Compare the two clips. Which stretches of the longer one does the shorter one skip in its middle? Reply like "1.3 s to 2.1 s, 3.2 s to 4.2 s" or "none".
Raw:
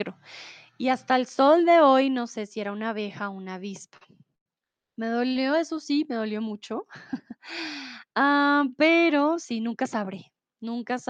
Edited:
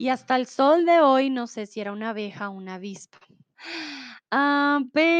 4.3 s to 7.4 s